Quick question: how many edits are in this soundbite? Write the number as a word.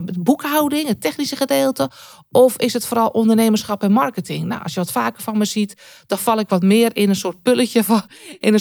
zero